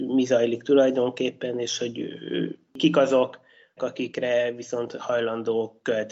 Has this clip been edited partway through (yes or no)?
yes